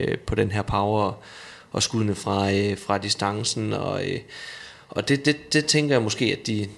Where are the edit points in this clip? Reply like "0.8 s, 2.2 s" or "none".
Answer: none